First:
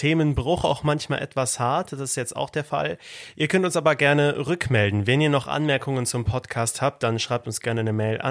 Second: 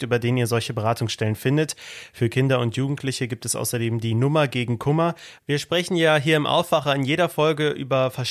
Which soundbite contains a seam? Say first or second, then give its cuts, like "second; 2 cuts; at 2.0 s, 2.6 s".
second; 1 cut; at 5.4 s